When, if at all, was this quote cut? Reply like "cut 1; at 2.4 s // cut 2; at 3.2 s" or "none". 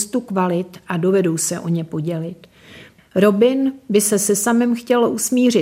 cut 1; at 3.0 s

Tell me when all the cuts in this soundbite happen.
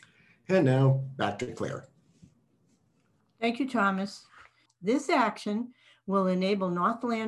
cut 1; at 4.7 s

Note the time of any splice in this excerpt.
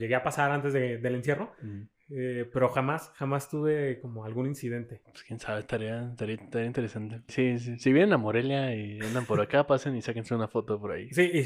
cut 1; at 5.0 s // cut 2; at 7.3 s

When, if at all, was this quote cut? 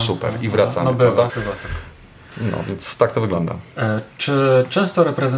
cut 1; at 1.3 s

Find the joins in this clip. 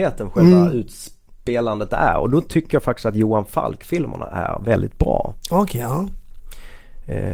none

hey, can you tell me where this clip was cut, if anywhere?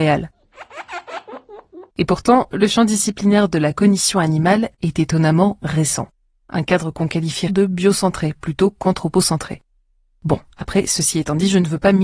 cut 1; at 1.9 s // cut 2; at 6.4 s // cut 3; at 7.5 s

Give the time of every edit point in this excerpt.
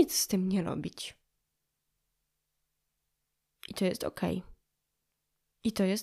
none

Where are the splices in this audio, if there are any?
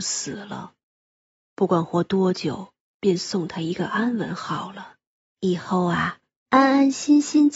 cut 1; at 2.9 s // cut 2; at 5.3 s

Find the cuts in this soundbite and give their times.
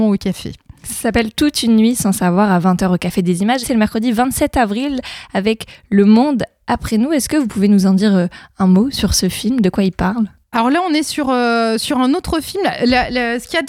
cut 1; at 3.6 s

